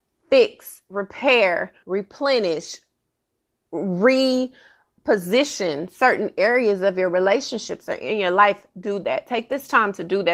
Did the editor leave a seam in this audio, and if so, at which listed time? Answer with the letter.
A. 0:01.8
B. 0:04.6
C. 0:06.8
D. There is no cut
A